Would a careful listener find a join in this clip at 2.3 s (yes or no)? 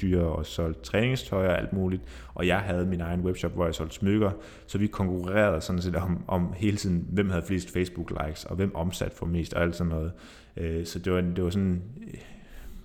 no